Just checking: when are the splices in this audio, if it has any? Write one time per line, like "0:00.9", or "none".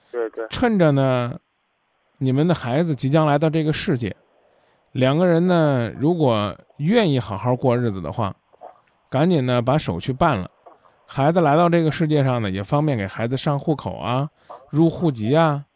none